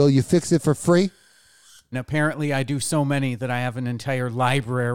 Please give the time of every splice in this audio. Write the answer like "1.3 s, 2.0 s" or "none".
1.9 s